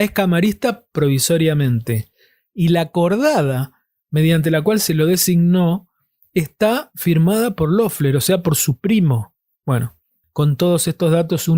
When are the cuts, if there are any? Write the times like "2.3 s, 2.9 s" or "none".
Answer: 9.5 s